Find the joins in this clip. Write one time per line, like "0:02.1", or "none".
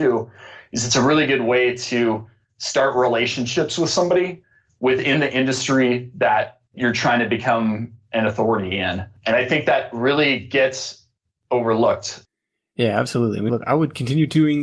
0:13.5